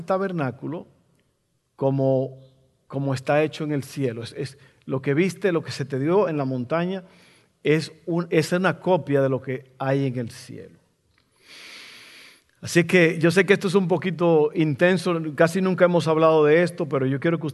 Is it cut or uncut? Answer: uncut